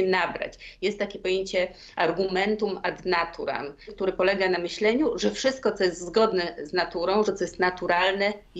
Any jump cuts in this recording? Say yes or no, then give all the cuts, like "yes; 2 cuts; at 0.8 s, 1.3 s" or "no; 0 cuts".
yes; 2 cuts; at 3.9 s, 7.2 s